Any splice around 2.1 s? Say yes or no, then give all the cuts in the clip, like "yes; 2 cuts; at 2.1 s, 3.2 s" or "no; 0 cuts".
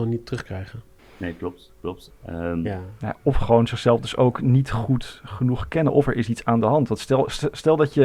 yes; 2 cuts; at 1.0 s, 2.1 s